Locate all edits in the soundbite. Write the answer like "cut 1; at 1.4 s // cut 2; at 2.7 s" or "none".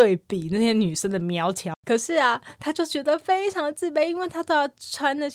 cut 1; at 1.7 s